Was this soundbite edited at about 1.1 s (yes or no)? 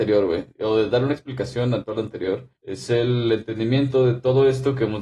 no